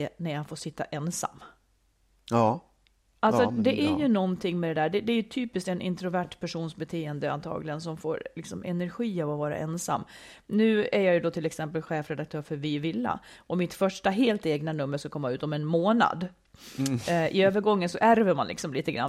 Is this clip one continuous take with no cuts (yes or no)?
yes